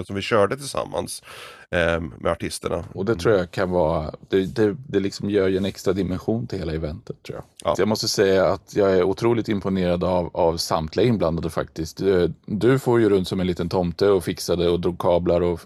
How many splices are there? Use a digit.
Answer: 2